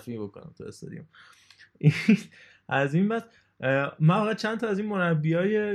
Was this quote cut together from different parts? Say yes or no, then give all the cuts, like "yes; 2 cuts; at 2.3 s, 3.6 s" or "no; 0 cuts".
no; 0 cuts